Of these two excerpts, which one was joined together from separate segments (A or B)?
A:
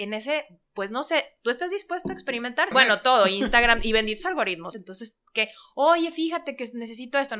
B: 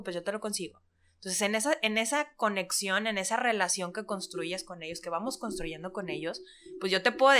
A